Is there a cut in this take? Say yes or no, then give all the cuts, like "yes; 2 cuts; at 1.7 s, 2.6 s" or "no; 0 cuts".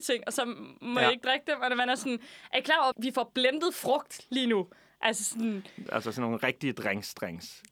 yes; 2 cuts; at 2.9 s, 5.9 s